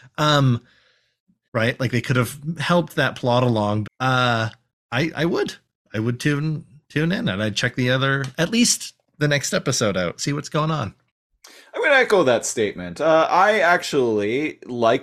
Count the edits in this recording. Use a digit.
2